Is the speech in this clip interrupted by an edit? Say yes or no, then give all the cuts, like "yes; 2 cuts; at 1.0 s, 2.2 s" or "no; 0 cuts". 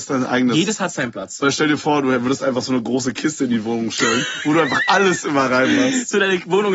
no; 0 cuts